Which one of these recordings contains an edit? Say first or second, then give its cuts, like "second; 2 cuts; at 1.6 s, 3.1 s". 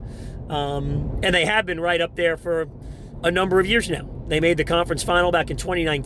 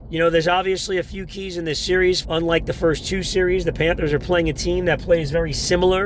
second; 1 cut; at 2.2 s